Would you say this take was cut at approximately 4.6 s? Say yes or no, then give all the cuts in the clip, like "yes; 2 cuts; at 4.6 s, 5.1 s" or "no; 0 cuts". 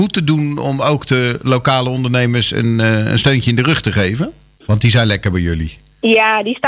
yes; 1 cut; at 4.6 s